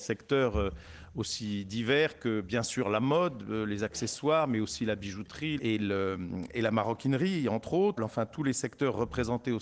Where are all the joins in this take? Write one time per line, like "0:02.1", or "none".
0:05.6
0:08.0